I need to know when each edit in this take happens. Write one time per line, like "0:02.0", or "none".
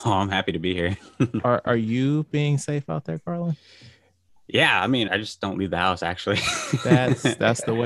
0:05.1